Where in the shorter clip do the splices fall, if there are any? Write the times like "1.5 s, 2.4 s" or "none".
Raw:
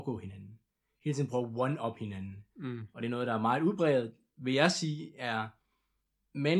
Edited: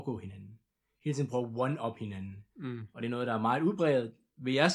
none